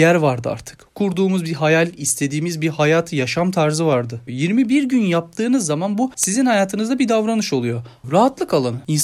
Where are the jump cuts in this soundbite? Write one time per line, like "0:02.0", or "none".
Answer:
0:04.3
0:08.0